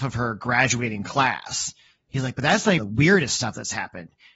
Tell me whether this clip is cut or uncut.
cut